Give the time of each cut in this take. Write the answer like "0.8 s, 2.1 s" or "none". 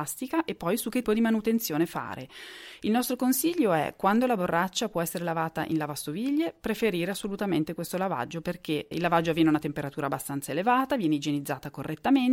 1.0 s, 8.9 s